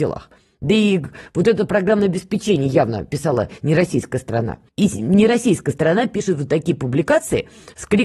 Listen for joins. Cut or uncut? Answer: cut